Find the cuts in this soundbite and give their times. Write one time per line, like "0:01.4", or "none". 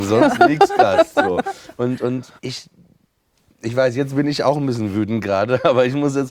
0:02.4